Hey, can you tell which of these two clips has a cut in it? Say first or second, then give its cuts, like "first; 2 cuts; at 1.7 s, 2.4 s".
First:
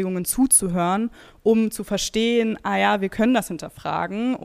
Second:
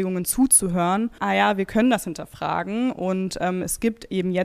second; 1 cut; at 1.2 s